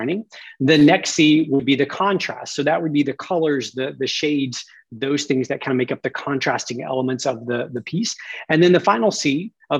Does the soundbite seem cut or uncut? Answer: uncut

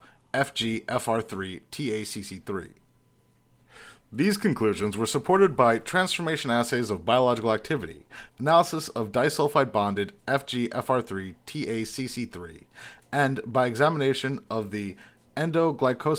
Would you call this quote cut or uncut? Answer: cut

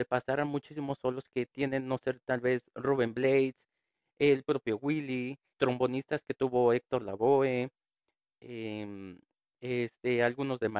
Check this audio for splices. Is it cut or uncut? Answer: cut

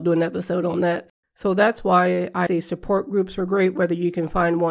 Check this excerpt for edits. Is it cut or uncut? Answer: cut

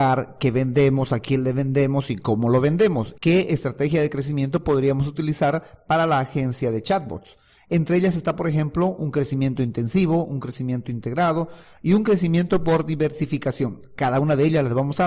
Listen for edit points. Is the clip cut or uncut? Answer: cut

